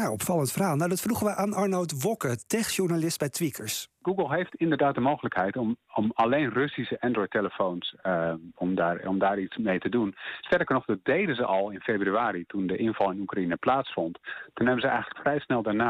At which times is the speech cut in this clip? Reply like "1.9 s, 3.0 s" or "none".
none